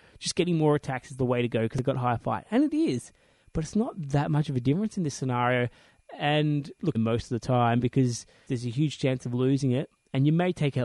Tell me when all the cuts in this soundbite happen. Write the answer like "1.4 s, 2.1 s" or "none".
6.9 s, 8.5 s